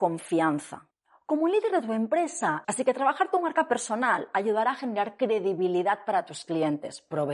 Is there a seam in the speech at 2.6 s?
yes; 1 cut; at 2.6 s

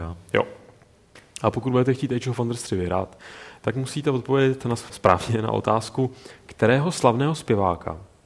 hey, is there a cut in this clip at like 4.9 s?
yes; 1 cut; at 4.9 s

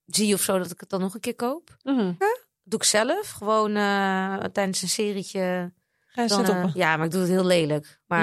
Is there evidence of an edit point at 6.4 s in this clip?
yes; 2 cuts; at 2.2 s, 6.4 s

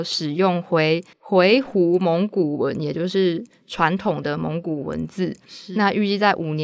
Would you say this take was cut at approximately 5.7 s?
no; 1 cut; at 1.1 s

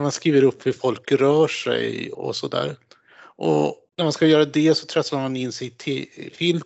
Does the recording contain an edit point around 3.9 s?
yes; 2 cuts; at 2.1 s, 3.9 s

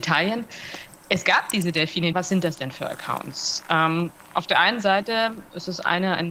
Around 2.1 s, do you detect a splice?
yes; 1 cut; at 2.1 s

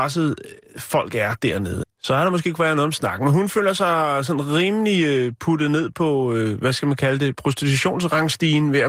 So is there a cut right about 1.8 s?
yes; 1 cut; at 1.8 s

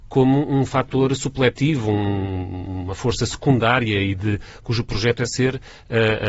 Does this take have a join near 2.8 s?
no; 0 cuts

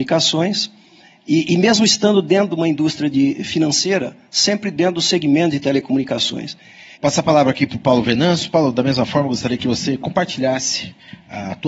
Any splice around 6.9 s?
yes; 1 cut; at 6.9 s

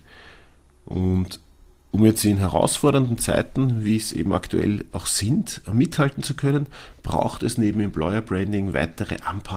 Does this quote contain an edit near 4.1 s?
no; 0 cuts

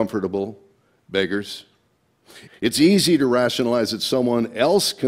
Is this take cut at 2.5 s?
yes; 1 cut; at 2.5 s

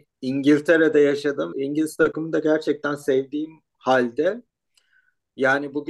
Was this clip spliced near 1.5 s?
yes; 1 cut; at 1.5 s

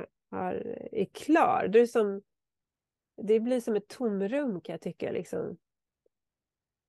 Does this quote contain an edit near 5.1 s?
no; 0 cuts

